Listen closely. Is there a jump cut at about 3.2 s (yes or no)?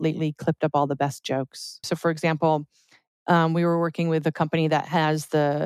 no